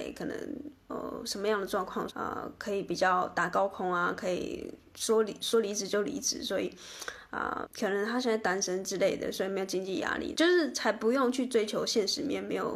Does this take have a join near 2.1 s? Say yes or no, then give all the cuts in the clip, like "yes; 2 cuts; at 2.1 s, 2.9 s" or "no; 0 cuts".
yes; 3 cuts; at 2.1 s, 7.6 s, 10.3 s